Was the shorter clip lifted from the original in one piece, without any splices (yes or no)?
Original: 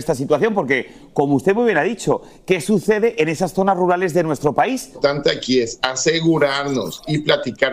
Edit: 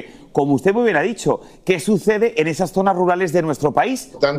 yes